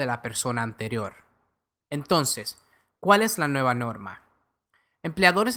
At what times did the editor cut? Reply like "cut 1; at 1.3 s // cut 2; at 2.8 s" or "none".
none